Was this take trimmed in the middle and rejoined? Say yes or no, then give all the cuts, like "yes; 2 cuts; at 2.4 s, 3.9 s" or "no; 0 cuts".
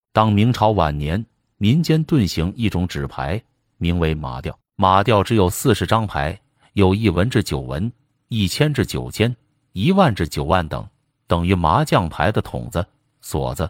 yes; 1 cut; at 4.7 s